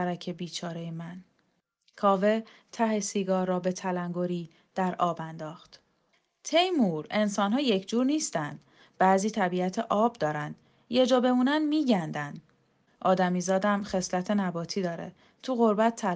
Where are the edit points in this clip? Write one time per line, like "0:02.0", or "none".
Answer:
0:12.9